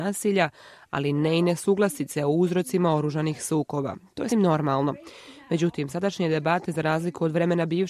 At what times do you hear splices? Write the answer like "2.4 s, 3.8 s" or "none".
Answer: 4.3 s